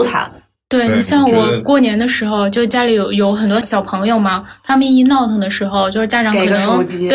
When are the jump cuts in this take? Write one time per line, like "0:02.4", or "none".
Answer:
0:03.6